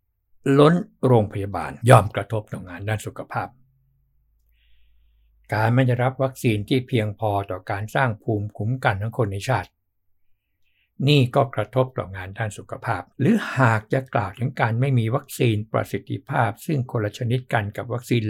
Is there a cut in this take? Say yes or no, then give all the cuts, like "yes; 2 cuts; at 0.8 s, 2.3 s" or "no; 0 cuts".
yes; 2 cuts; at 1.8 s, 13.1 s